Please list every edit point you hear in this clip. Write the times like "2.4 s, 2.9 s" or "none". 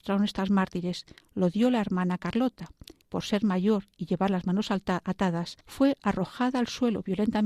3.0 s, 5.6 s

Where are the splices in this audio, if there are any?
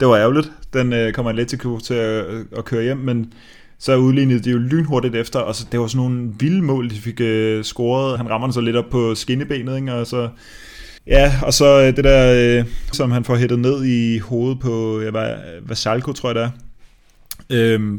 8.2 s, 11.0 s, 12.9 s

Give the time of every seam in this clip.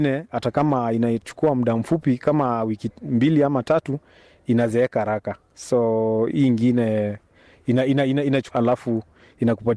8.5 s

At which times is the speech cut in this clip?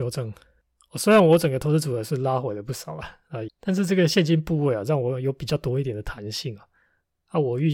3.5 s

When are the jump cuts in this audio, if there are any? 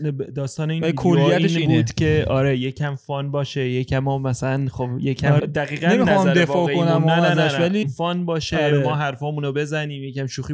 5.4 s, 7.8 s

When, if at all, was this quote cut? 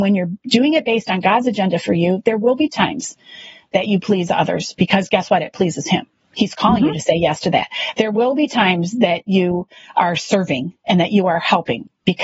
none

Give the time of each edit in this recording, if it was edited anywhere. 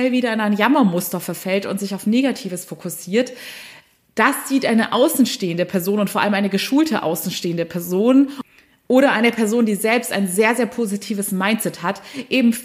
none

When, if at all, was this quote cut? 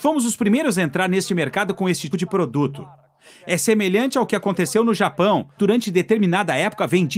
2.1 s, 5.6 s

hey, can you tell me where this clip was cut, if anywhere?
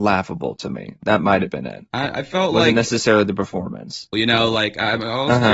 4.1 s

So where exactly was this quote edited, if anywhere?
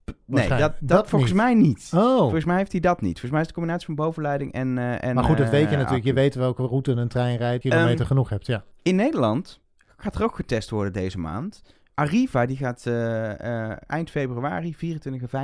7.6 s

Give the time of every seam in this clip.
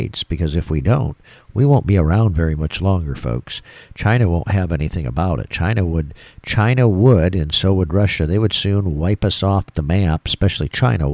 none

